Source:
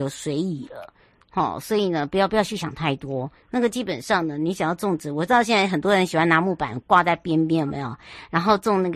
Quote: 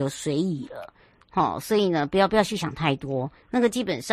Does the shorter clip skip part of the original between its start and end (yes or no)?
no